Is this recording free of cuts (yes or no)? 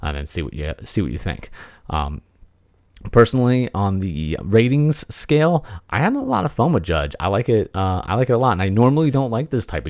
yes